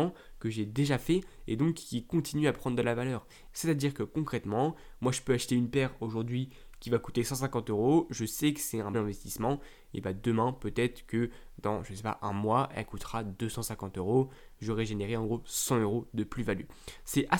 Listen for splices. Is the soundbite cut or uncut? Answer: cut